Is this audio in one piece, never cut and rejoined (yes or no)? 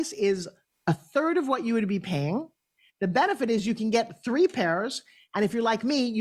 yes